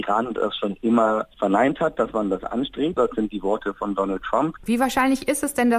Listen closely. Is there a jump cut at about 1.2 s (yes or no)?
no